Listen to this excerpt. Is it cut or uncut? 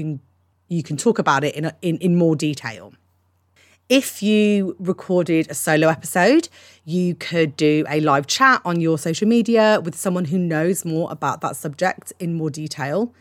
uncut